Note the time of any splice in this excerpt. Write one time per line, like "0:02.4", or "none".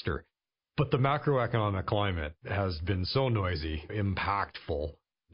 0:03.9

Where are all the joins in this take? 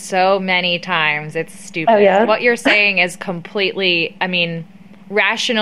none

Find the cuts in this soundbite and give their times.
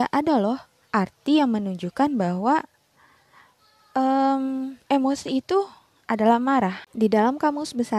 0:06.9

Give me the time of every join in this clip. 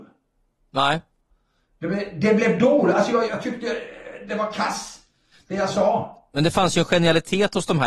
0:03.3

